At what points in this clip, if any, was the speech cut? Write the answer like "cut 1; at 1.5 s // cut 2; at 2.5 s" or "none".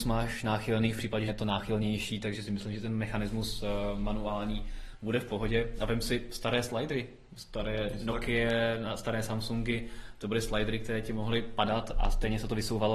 cut 1; at 1.3 s